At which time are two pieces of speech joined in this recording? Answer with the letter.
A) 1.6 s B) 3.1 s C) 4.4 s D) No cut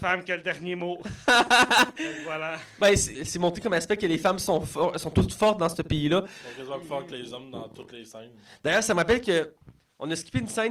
B